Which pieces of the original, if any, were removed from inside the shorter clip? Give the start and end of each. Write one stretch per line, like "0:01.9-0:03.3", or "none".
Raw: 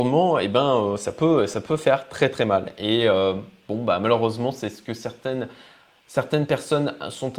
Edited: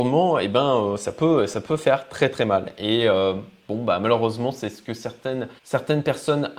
0:05.6-0:06.0